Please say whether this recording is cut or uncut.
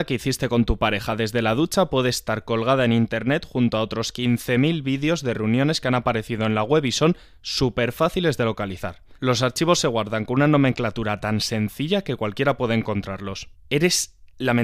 cut